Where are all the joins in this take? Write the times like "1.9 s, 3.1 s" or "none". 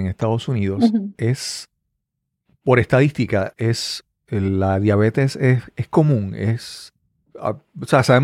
3.6 s